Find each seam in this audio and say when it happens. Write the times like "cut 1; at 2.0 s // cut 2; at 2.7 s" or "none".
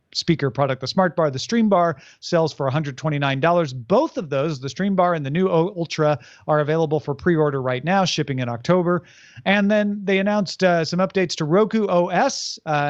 none